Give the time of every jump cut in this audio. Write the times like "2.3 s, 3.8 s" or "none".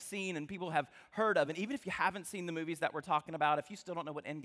none